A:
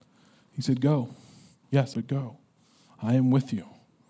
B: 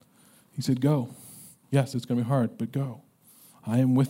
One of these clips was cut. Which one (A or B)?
A